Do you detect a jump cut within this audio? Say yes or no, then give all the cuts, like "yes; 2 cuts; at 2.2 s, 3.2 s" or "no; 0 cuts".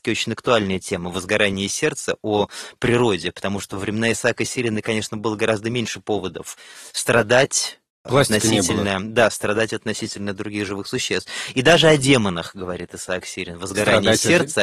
no; 0 cuts